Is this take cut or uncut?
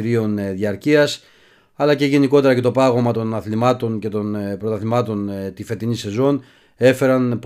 uncut